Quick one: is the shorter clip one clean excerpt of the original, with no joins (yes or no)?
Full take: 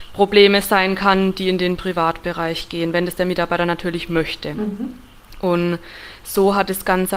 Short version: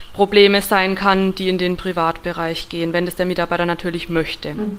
yes